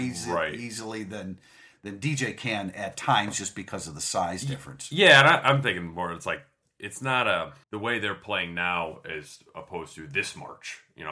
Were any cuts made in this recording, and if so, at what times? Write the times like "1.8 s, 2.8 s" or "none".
7.6 s